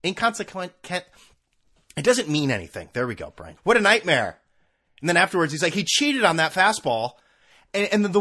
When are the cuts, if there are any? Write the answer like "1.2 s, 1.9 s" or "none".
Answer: 3.6 s